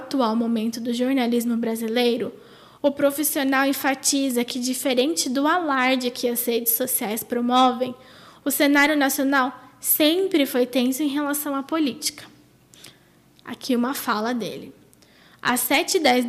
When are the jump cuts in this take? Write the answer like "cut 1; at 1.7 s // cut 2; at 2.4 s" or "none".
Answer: cut 1; at 15.3 s